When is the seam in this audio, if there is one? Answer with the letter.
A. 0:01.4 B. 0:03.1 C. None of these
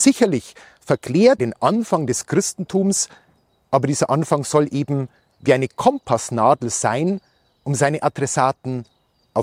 A